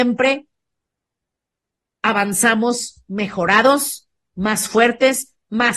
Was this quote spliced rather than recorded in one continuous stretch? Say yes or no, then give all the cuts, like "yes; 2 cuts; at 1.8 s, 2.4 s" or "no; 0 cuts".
no; 0 cuts